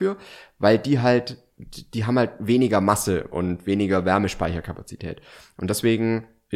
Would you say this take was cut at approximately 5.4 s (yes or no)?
no